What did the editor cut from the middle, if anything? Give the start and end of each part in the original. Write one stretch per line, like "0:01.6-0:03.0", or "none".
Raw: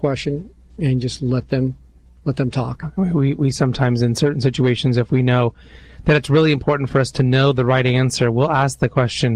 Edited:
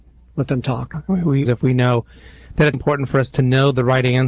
0:03.3-0:04.9
0:06.2-0:06.5